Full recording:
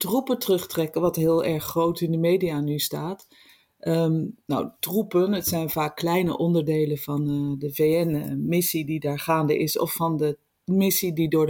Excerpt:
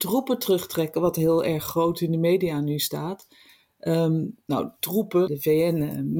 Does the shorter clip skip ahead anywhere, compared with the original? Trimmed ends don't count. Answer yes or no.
yes